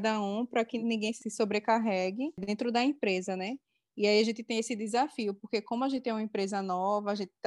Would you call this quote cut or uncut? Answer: uncut